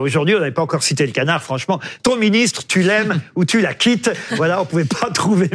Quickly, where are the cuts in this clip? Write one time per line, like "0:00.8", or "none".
0:02.0